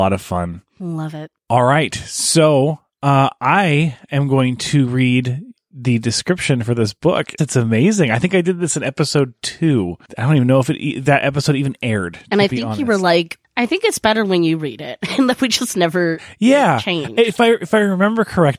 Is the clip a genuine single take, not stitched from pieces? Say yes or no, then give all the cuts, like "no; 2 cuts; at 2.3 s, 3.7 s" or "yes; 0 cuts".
no; 1 cut; at 7.4 s